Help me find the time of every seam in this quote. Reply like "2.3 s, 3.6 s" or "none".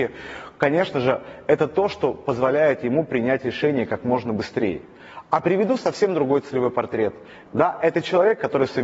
7.5 s